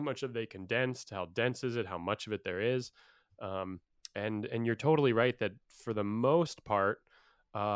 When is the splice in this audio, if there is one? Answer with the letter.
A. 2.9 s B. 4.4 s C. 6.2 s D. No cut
D